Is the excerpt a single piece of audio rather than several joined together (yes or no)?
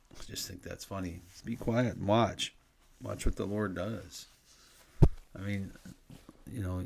no